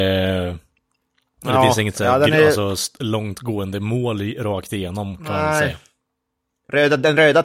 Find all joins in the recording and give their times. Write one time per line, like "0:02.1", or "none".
none